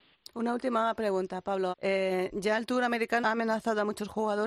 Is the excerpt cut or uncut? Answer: cut